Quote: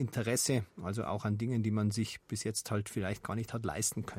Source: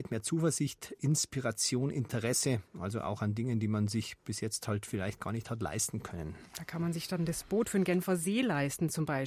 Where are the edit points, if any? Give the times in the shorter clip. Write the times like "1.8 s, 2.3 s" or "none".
none